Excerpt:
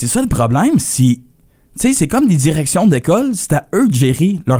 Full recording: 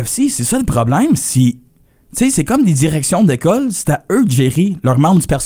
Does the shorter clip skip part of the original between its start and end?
no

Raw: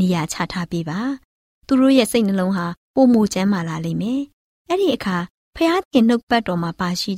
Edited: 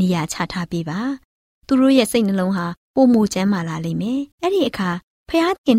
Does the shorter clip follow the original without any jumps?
no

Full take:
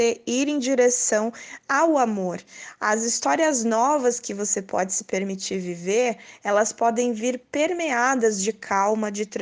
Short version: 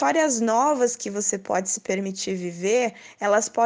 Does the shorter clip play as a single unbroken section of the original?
yes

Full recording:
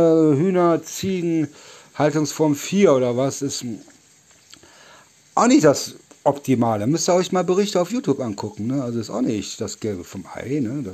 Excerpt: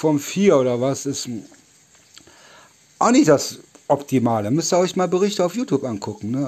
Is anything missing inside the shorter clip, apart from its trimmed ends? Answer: no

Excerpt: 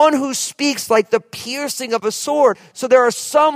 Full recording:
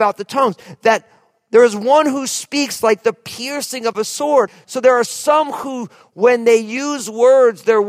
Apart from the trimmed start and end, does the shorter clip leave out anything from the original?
no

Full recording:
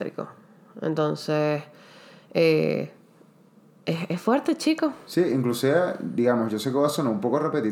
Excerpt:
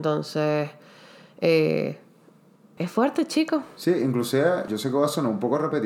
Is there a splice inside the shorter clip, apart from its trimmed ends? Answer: yes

